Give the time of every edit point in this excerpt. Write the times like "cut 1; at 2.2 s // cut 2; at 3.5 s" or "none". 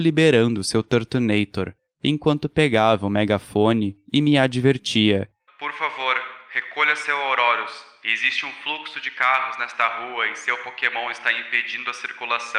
cut 1; at 5.5 s

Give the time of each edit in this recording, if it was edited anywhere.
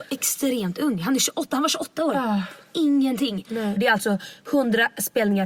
cut 1; at 3.8 s

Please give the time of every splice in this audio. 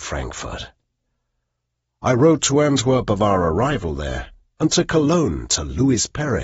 none

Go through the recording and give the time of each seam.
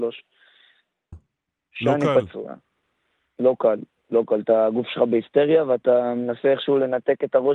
cut 1; at 1.1 s

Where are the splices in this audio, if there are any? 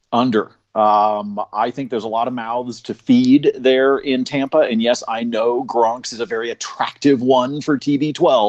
none

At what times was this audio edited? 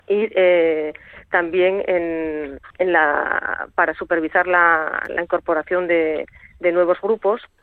cut 1; at 2.7 s

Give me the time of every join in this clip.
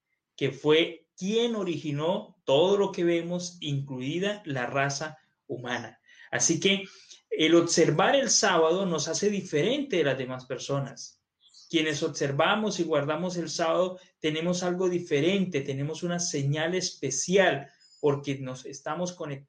none

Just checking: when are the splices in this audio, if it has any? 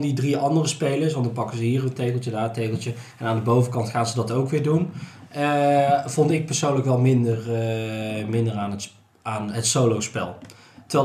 none

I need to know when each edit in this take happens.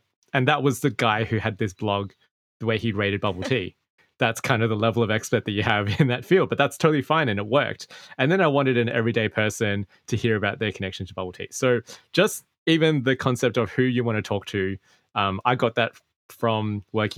none

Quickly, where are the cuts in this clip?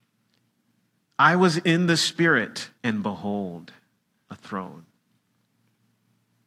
cut 1; at 2.8 s

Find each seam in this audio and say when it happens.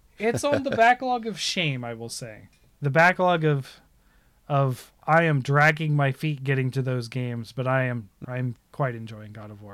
cut 1; at 8.2 s

